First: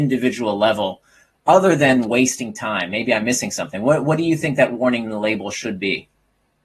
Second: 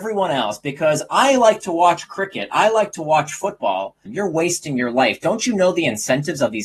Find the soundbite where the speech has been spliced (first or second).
second